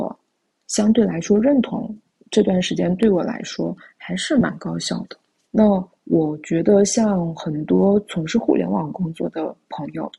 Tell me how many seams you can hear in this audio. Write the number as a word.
one